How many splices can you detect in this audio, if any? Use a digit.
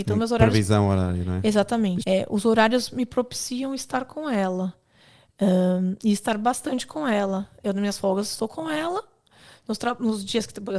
1